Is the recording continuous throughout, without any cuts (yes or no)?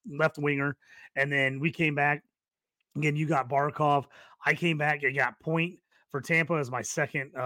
yes